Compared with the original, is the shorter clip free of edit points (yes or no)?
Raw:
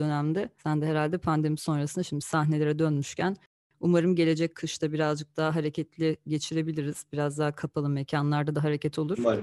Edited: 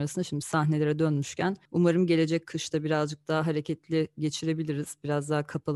no